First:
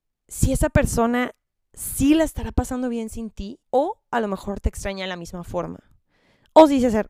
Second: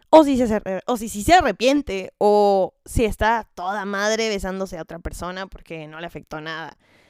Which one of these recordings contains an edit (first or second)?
first